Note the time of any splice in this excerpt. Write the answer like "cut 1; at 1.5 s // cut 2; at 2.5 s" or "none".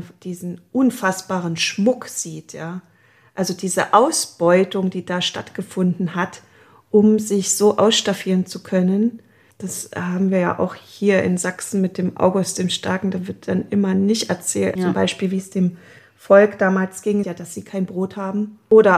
cut 1; at 14.8 s // cut 2; at 17.2 s